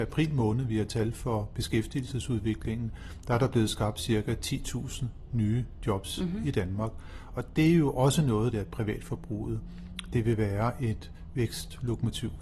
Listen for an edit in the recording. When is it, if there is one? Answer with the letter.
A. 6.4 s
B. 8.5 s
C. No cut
B